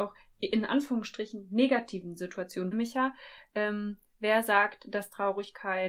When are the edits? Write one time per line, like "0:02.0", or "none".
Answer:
0:02.7